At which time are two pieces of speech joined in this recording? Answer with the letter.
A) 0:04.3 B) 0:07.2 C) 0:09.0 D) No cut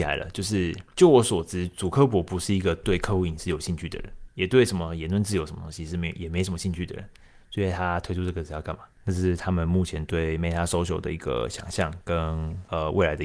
C